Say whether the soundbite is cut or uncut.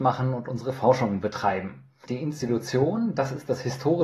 cut